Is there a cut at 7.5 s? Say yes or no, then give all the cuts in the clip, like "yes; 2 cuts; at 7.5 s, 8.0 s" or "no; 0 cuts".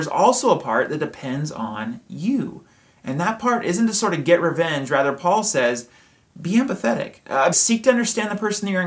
yes; 1 cut; at 7.5 s